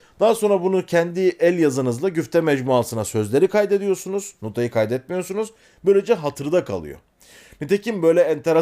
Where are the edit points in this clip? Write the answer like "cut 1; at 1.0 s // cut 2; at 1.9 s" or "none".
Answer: none

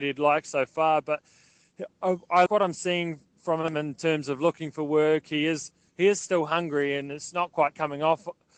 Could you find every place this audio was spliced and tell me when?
cut 1; at 2.5 s

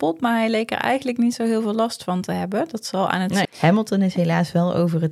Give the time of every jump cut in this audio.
cut 1; at 3.4 s

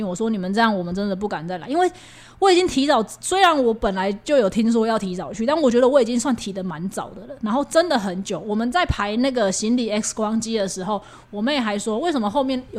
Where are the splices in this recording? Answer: none

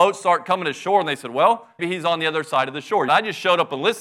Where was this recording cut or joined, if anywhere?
cut 1; at 1.8 s // cut 2; at 3.1 s

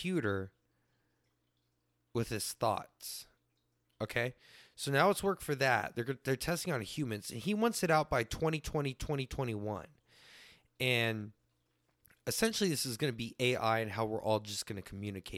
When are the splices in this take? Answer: none

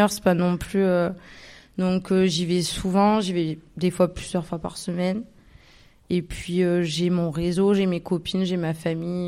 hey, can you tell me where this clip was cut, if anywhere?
none

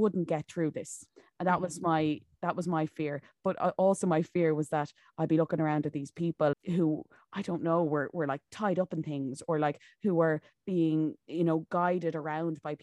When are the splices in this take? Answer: cut 1; at 6.5 s

